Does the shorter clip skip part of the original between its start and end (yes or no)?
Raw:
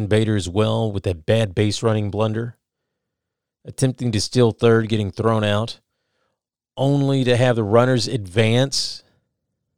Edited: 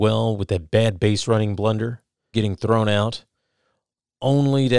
yes